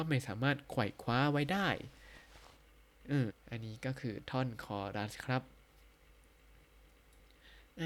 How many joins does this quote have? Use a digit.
1